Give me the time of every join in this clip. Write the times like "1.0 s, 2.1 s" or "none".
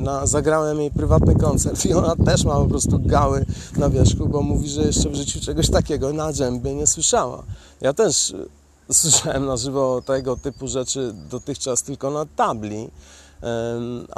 none